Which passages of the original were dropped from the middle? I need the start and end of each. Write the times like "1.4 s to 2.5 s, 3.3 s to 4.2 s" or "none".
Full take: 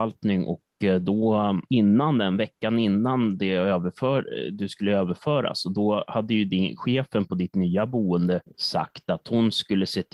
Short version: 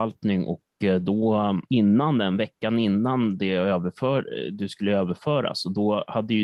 none